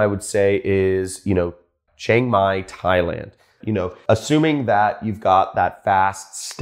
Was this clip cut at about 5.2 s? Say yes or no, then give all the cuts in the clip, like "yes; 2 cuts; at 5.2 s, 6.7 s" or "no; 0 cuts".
no; 2 cuts; at 1.9 s, 3.6 s